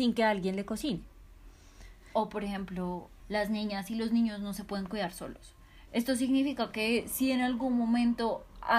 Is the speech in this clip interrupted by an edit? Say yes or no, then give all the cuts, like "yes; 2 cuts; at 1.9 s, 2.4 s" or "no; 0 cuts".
yes; 2 cuts; at 3.2 s, 5.9 s